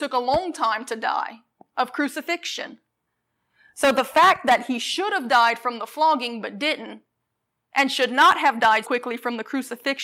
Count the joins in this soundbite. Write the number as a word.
one